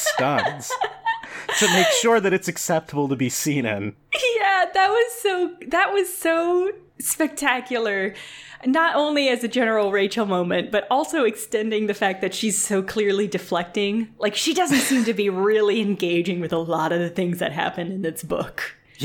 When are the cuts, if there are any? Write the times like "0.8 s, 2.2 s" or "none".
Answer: 6.9 s